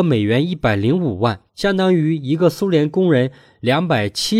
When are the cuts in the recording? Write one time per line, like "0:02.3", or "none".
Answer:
0:01.5